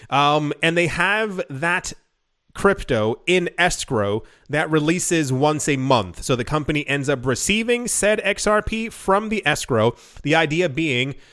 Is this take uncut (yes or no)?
yes